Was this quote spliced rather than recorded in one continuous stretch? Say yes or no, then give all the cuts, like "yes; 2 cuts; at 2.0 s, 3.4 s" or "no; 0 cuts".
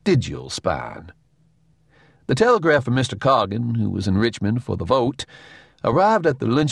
no; 0 cuts